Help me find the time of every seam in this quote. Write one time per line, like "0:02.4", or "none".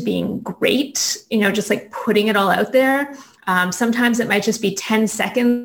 none